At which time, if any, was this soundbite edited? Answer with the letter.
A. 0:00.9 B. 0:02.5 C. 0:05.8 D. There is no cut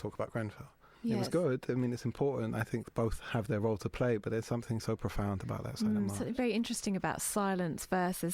A